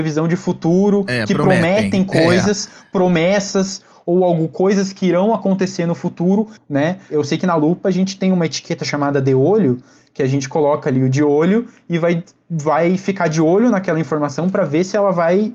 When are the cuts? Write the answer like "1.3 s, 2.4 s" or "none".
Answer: 6.6 s